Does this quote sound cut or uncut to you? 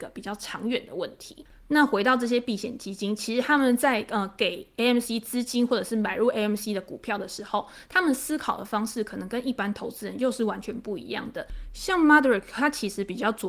uncut